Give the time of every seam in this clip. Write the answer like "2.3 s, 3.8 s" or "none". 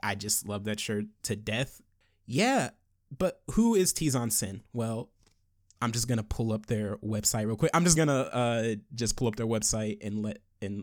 8.0 s